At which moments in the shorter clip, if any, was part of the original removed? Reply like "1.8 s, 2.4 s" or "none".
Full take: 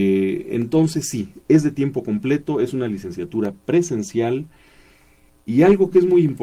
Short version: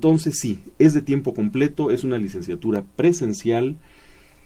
none